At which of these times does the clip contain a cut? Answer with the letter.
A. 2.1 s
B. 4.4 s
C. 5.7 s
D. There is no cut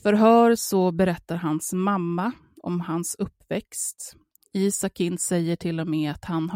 B